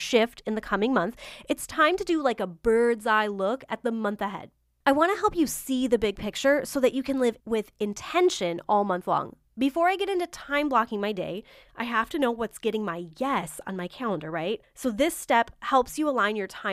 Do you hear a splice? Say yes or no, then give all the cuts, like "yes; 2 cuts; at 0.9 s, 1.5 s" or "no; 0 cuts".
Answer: no; 0 cuts